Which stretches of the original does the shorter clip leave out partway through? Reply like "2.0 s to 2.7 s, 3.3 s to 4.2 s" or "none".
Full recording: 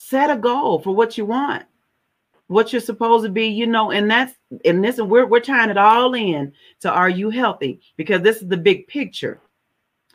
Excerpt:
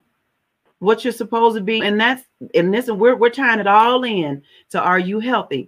3.5 s to 3.9 s